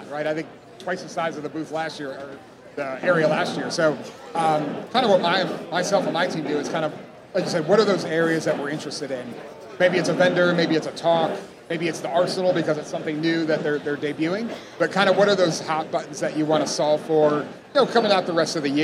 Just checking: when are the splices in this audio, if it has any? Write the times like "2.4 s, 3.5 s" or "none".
none